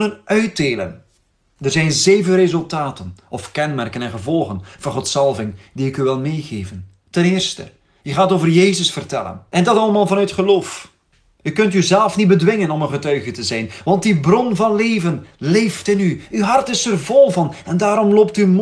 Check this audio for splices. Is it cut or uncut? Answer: uncut